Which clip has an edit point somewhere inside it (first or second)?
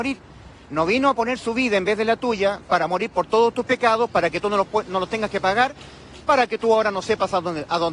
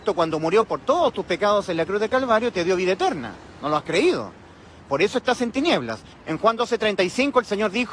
second